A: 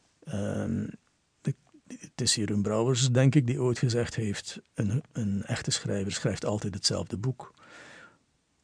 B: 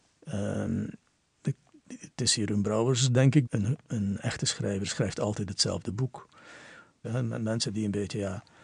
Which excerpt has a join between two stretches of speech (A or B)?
B